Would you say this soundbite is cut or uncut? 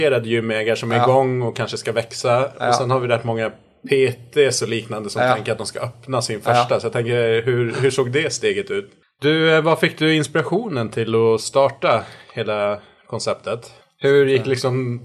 cut